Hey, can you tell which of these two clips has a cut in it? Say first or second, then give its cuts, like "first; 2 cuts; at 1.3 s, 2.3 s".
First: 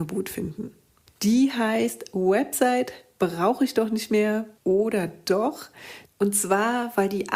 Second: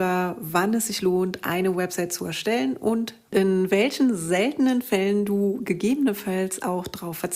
first; 3 cuts; at 1.1 s, 4.6 s, 6.0 s